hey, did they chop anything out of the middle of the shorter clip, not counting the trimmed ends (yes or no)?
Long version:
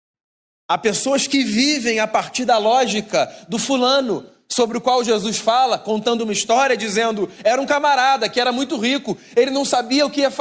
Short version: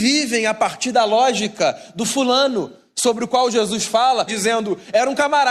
yes